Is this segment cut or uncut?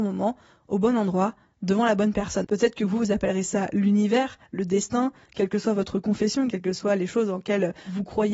cut